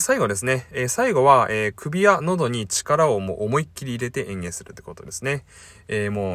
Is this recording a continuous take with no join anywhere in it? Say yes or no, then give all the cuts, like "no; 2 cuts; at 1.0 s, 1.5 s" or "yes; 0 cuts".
yes; 0 cuts